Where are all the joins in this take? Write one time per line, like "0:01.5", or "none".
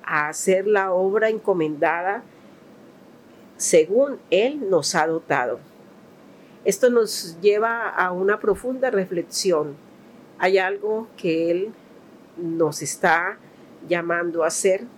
none